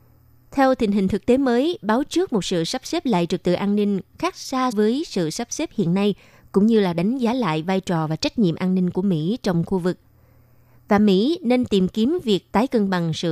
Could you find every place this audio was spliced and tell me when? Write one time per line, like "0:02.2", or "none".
0:04.7